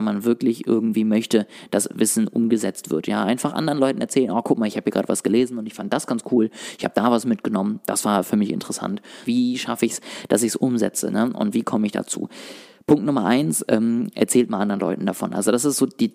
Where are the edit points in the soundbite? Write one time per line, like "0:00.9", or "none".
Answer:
0:09.3